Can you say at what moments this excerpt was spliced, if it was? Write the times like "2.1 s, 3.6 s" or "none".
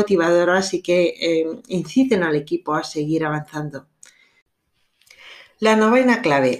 none